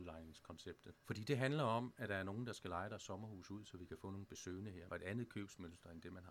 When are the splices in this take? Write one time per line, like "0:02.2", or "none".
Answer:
0:00.9
0:04.9